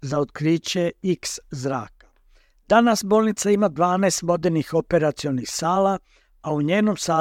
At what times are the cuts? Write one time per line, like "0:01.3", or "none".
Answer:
none